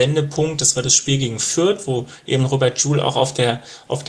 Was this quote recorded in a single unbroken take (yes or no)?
yes